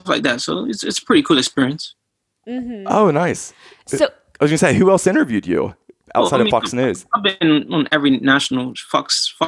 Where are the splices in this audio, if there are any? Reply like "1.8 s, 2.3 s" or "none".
none